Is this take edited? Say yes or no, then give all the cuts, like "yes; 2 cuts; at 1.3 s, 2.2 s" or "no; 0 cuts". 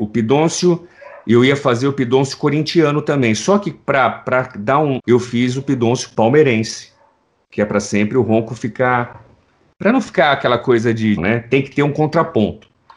yes; 2 cuts; at 5.0 s, 11.2 s